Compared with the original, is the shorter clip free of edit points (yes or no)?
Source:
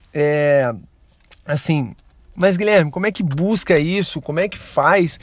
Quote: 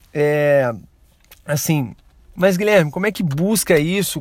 yes